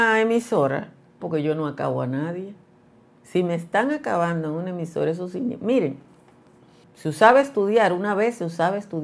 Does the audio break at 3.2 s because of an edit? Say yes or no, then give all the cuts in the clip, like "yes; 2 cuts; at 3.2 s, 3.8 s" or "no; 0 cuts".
no; 2 cuts; at 1.2 s, 6.8 s